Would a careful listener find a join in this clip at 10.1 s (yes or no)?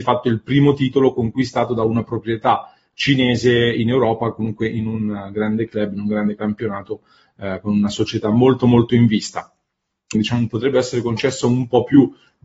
yes